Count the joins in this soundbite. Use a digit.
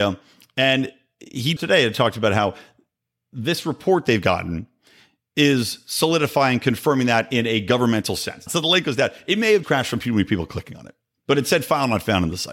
3